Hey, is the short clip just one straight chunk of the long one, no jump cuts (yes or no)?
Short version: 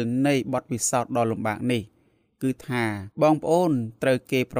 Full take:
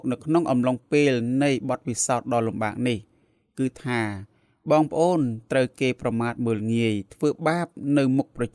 no